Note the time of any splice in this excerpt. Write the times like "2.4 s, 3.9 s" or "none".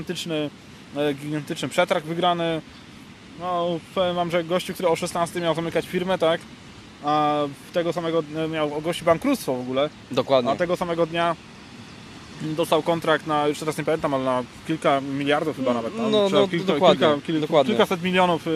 none